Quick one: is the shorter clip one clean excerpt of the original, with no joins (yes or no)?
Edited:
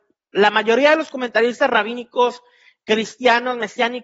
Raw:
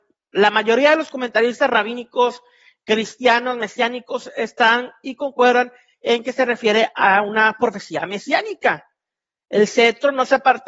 yes